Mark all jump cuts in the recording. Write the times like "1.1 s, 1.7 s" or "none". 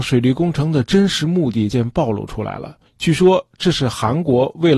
1.7 s, 2.9 s